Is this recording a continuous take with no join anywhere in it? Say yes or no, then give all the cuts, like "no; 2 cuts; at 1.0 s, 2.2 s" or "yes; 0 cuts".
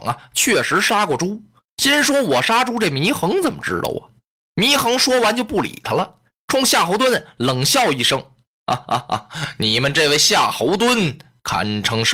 no; 1 cut; at 6.4 s